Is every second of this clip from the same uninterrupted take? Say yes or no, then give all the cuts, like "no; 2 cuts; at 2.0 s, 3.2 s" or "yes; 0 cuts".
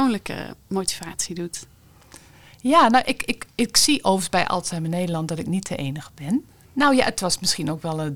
no; 1 cut; at 6.6 s